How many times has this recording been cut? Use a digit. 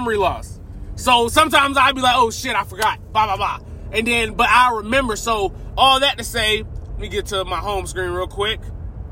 1